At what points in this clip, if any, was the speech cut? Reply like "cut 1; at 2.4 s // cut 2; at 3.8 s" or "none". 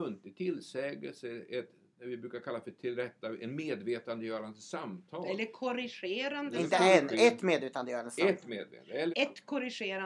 cut 1; at 9.1 s